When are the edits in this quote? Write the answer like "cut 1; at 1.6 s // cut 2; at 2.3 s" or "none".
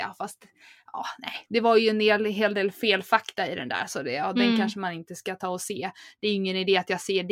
none